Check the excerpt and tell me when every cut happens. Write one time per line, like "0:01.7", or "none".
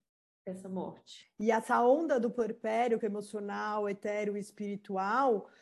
0:01.2
0:03.0